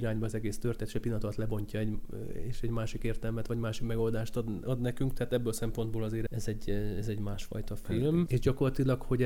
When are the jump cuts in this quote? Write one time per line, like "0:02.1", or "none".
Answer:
0:06.3
0:08.3